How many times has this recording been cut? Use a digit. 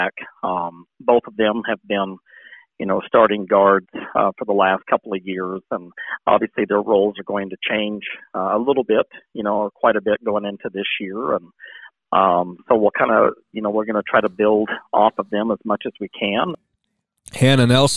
0